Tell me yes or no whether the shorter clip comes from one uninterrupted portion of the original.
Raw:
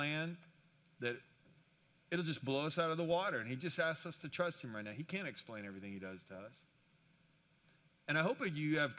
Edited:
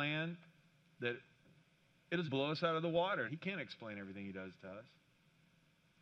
no